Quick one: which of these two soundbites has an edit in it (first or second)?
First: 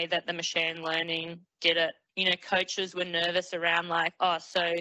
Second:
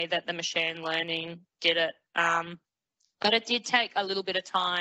first